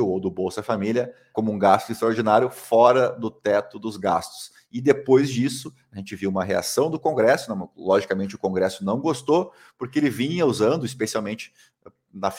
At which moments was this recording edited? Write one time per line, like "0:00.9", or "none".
0:01.3